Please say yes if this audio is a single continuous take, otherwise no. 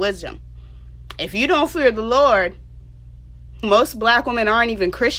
no